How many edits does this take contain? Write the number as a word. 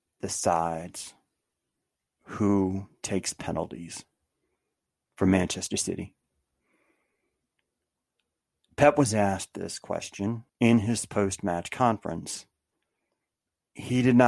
one